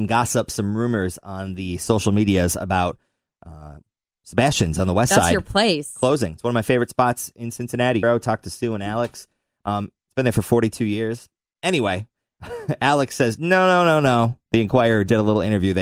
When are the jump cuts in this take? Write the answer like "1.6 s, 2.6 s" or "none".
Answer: 8.0 s